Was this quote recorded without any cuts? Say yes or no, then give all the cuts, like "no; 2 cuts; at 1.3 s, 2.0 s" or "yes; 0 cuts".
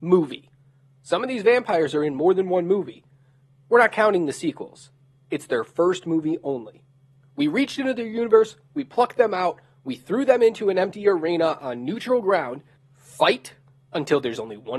no; 1 cut; at 12.8 s